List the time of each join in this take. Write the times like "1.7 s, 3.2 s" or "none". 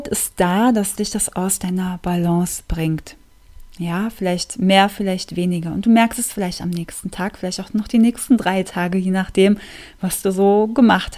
none